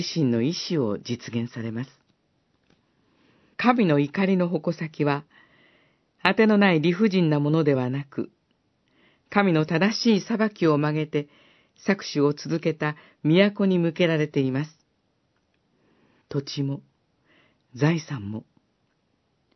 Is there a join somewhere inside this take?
yes; 2 cuts; at 3.5 s, 16.2 s

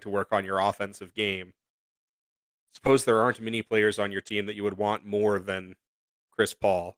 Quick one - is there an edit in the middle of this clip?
no; 0 cuts

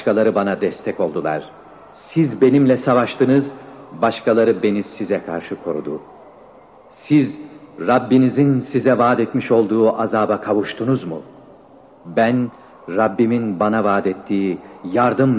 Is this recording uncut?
yes; 0 cuts

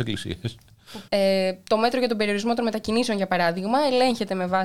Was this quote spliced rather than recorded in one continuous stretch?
yes; 1 cut; at 1.1 s

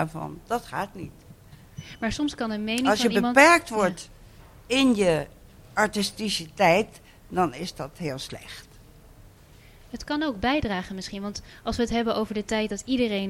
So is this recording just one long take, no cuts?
yes; 0 cuts

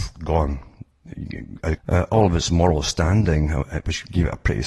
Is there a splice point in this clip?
yes; 1 cut; at 1.8 s

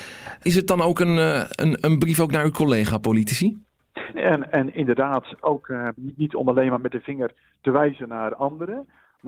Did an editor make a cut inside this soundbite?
yes; 2 cuts; at 4.1 s, 6.0 s

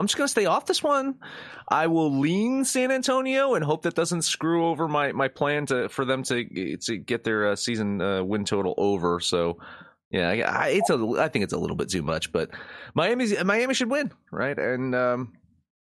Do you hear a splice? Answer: no; 0 cuts

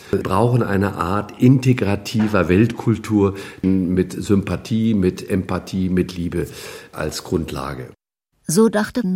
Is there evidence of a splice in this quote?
no; 0 cuts

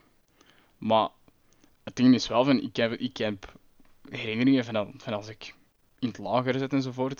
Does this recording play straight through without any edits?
yes; 0 cuts

